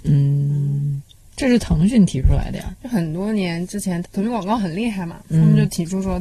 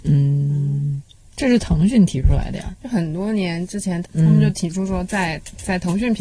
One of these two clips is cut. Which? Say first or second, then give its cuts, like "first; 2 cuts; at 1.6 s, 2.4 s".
second; 1 cut; at 4.1 s